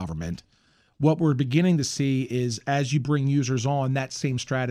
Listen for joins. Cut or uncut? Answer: uncut